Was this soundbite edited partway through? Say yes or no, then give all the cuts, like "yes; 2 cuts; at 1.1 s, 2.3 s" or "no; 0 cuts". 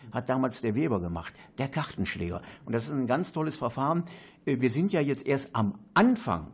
no; 0 cuts